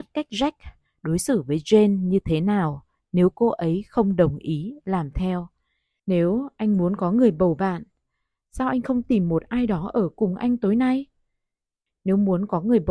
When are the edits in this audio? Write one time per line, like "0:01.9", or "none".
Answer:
0:06.0
0:11.9